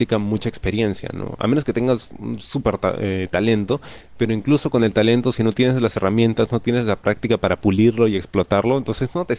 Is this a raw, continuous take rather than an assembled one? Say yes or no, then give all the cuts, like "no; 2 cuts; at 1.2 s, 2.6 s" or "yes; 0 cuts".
yes; 0 cuts